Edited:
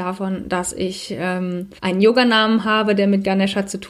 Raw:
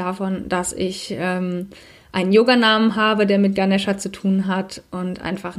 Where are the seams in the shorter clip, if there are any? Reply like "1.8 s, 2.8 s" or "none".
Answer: 1.8 s